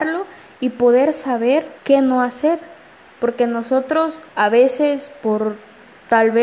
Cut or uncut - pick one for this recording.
cut